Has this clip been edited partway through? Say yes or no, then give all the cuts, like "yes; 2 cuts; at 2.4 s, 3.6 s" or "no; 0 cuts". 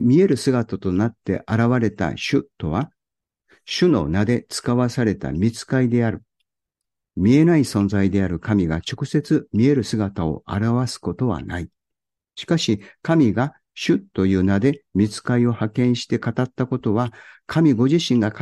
no; 0 cuts